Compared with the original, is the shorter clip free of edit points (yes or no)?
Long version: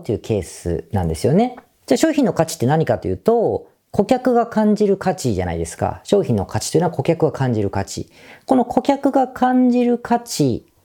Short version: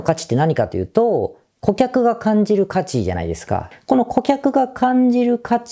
no